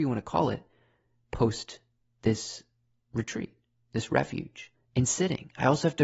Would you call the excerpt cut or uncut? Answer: cut